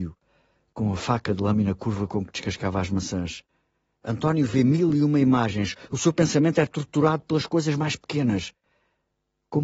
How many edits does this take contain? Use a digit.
1